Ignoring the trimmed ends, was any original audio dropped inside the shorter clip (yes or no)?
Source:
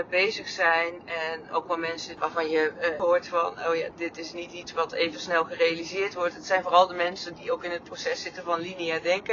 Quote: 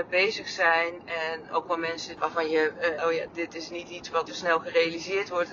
yes